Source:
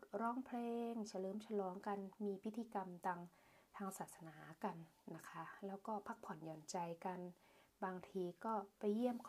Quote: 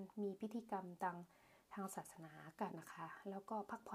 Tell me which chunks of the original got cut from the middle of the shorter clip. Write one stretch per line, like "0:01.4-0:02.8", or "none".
0:04.7-0:05.1